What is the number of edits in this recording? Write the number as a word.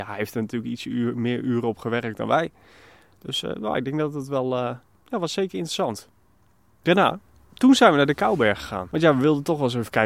zero